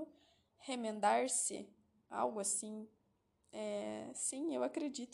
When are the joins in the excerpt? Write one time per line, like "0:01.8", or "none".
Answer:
none